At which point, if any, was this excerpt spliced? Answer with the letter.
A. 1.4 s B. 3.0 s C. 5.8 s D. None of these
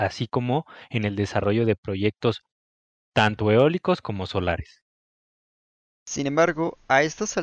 D